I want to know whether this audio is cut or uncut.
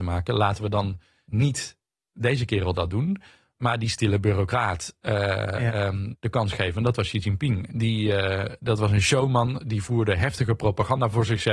cut